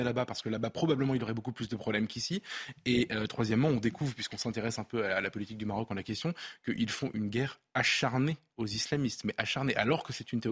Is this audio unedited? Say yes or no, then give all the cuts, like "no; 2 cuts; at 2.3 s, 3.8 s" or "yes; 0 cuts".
yes; 0 cuts